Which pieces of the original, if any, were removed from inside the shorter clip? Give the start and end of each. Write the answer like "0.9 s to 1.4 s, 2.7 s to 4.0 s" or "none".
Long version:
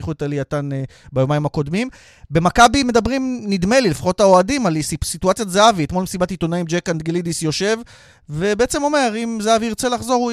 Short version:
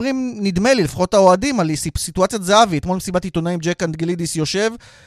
none